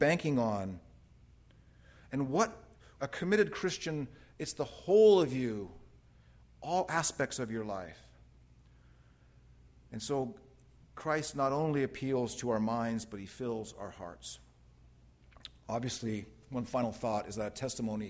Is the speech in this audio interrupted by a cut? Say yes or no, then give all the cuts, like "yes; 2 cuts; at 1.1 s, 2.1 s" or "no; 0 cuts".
yes; 1 cut; at 3.0 s